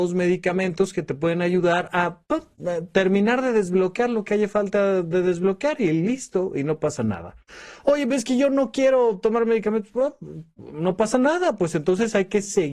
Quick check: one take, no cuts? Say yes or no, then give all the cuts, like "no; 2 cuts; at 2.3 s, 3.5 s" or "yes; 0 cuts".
yes; 0 cuts